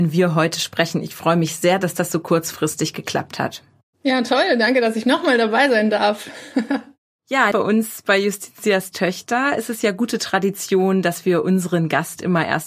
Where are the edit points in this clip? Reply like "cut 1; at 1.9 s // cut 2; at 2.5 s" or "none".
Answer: cut 1; at 7.5 s

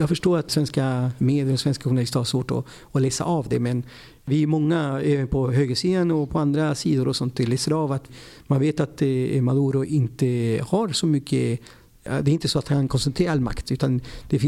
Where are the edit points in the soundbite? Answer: none

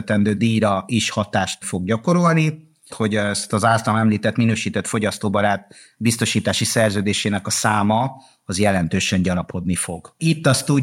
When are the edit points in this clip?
cut 1; at 2.9 s

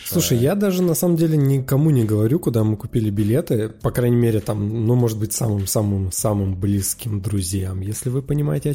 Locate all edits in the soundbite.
none

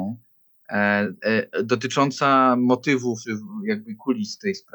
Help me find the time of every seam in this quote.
cut 1; at 3.2 s

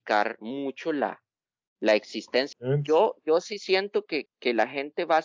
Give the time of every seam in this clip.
cut 1; at 2.5 s // cut 2; at 4.3 s

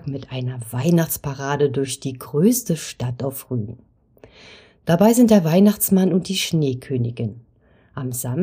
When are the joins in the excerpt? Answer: none

